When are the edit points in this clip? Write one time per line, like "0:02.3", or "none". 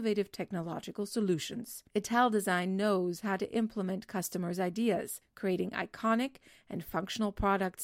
0:01.9

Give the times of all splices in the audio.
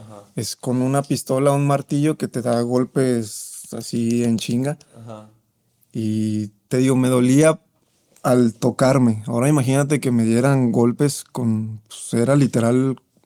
none

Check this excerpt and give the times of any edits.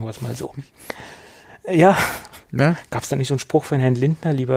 none

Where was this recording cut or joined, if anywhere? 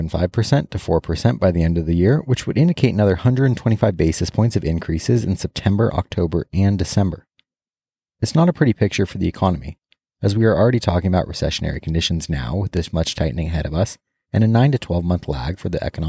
none

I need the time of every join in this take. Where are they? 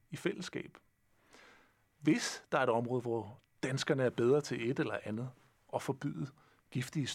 none

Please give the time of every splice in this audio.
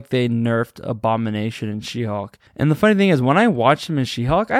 0:02.5

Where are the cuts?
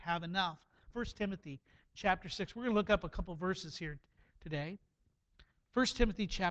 0:00.9

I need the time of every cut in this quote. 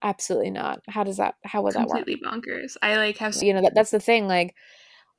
0:03.4

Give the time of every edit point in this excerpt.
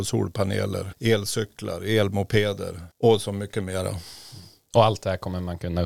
0:00.9
0:02.9

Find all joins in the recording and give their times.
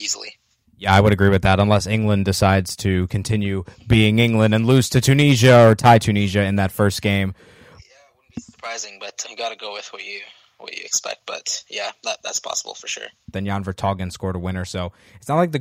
0:09.2
0:13.3

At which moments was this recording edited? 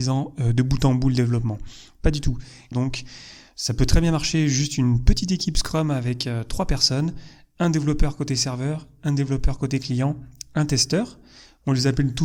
0:02.7

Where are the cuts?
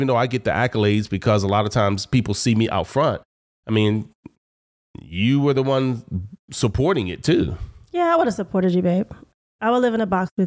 none

